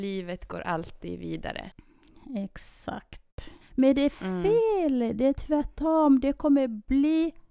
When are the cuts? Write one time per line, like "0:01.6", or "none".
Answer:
0:03.6